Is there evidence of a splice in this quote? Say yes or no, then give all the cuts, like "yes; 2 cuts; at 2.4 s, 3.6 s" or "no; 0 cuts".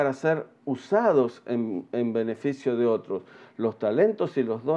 no; 0 cuts